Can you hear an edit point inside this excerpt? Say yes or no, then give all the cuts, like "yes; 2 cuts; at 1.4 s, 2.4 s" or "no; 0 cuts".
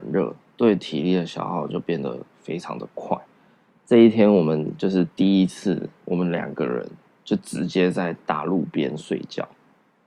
no; 0 cuts